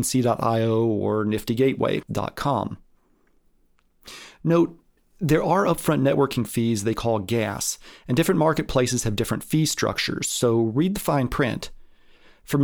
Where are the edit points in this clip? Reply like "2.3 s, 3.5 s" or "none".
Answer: none